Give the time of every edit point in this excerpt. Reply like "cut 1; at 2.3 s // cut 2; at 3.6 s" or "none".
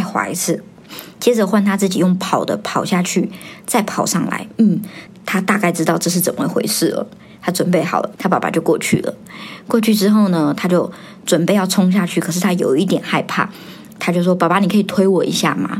cut 1; at 5.1 s // cut 2; at 8.2 s